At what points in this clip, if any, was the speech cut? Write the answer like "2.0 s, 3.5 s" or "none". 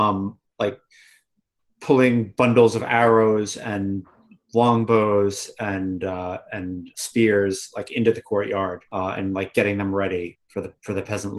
6.9 s, 8.9 s, 10.3 s